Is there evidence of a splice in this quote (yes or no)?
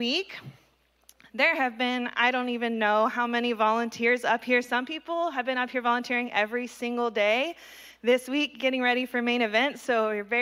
no